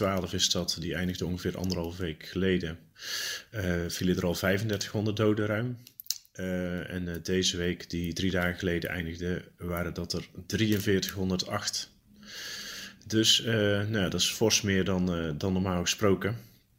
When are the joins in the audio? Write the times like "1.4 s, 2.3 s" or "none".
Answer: none